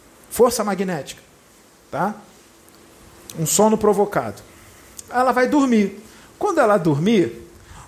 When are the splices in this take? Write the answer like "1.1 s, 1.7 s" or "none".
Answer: none